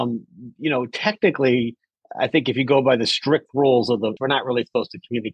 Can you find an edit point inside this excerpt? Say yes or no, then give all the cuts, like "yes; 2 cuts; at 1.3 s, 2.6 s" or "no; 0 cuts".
yes; 1 cut; at 4.2 s